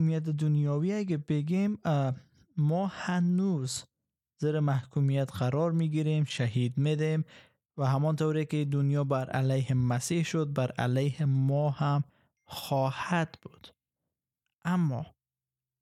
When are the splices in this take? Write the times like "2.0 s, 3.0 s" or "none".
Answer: none